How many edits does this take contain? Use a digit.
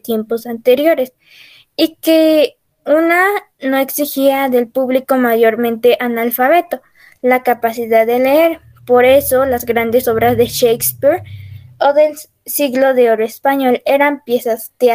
0